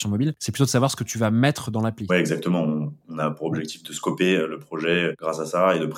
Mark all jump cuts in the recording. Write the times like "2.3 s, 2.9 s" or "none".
2.1 s